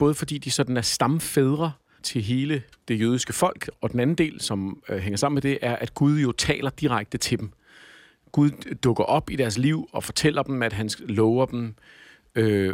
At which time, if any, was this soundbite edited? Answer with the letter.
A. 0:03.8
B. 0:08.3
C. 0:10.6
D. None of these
D